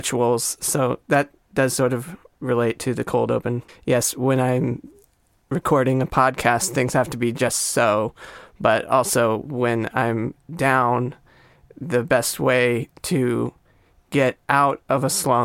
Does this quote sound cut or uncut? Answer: cut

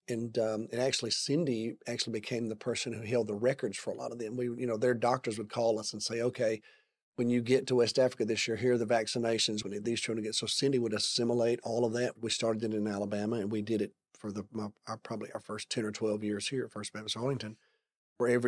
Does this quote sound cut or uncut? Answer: cut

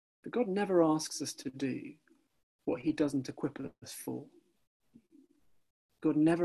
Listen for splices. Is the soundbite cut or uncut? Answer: uncut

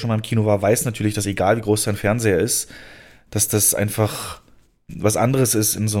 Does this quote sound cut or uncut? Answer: cut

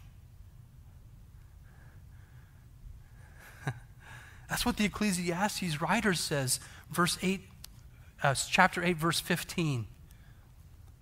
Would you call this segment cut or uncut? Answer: uncut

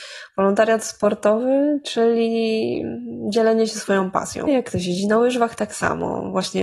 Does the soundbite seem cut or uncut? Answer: cut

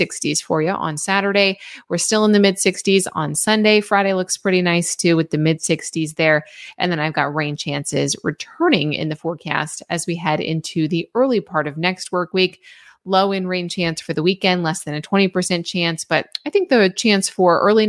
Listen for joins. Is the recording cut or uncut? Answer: uncut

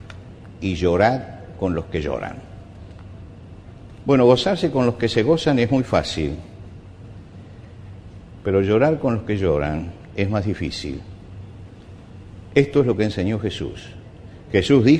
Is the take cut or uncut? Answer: cut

